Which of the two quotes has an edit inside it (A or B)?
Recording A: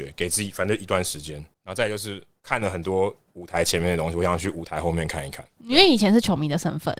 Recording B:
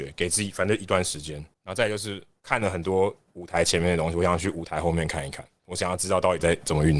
A